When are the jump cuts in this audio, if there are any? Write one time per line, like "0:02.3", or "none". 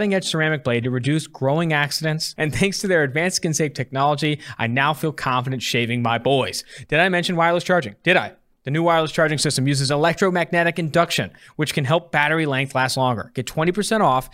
0:02.4